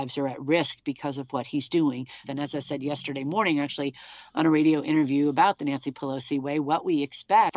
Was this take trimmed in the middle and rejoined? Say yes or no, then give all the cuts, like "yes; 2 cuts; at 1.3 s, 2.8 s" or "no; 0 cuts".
yes; 1 cut; at 2.2 s